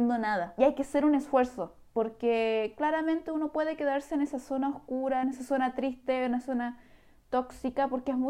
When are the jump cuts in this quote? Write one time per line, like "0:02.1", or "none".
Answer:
none